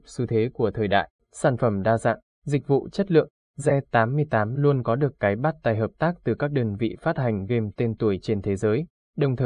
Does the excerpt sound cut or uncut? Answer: cut